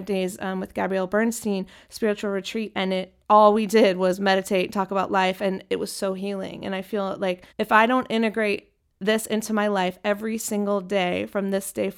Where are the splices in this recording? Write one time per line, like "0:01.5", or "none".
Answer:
0:03.2
0:07.5